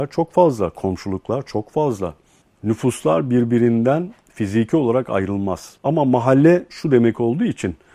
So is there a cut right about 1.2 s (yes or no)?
no